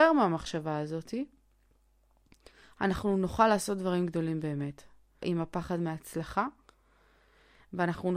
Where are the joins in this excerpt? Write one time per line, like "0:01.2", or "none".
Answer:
0:05.2